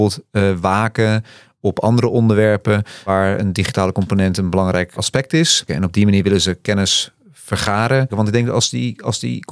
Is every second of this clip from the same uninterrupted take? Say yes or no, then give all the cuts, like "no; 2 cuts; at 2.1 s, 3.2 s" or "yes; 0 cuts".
no; 2 cuts; at 5.7 s, 8.1 s